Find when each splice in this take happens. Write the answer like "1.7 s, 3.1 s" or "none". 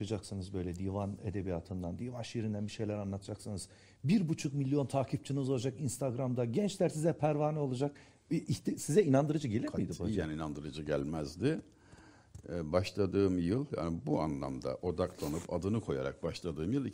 none

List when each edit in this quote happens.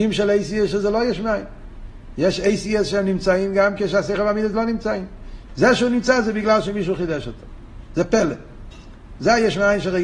5.5 s

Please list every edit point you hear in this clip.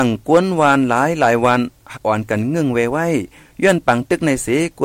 2.0 s

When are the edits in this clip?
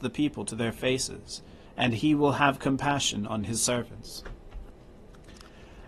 1.7 s

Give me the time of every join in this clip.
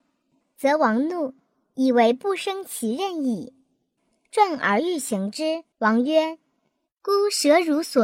4.0 s, 5.7 s

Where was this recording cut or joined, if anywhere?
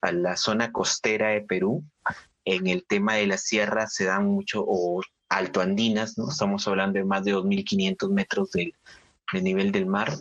none

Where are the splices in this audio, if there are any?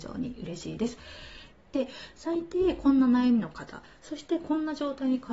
1.5 s, 4.0 s

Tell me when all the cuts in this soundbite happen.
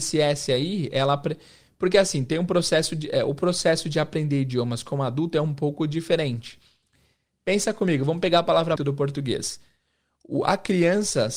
8.8 s

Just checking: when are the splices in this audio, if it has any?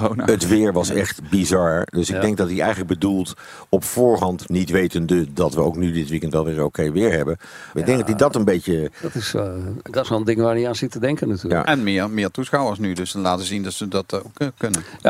7.7 s

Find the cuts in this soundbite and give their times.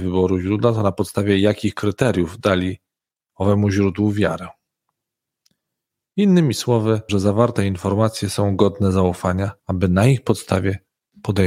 7.1 s, 9.6 s

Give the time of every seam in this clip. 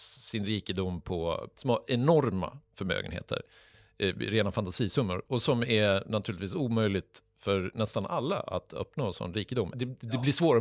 1.5 s, 9.7 s

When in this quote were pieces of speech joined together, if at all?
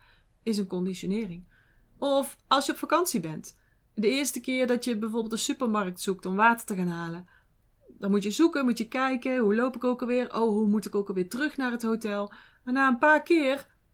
none

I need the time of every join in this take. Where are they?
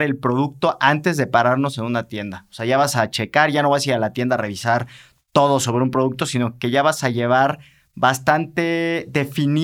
none

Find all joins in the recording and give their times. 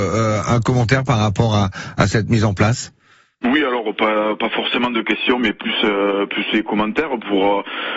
none

